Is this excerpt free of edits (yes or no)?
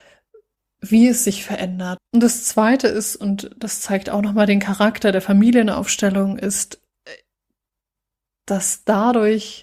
no